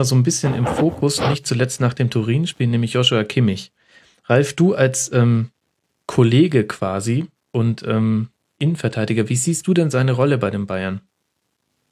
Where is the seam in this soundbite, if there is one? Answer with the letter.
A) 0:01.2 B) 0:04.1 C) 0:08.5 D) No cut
D